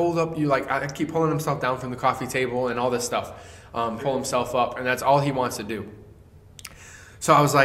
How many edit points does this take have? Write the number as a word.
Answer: one